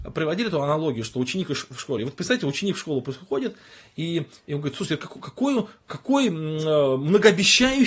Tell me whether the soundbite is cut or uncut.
uncut